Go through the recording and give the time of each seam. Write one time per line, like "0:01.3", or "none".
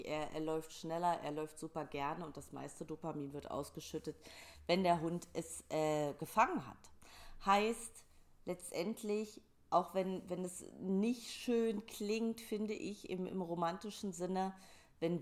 none